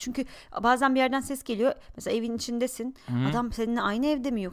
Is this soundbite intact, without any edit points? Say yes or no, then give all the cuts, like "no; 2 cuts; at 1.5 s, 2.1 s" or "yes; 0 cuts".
yes; 0 cuts